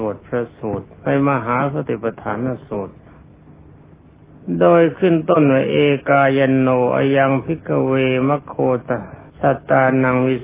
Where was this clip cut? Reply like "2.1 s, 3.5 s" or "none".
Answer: 9.3 s